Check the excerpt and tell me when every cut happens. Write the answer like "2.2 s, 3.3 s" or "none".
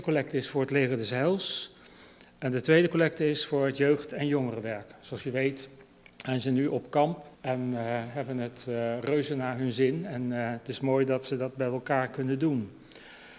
7.3 s